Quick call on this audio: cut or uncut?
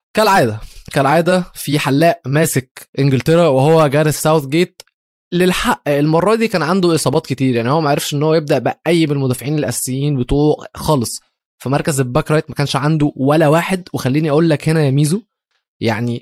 uncut